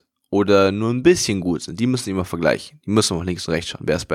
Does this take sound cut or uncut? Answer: uncut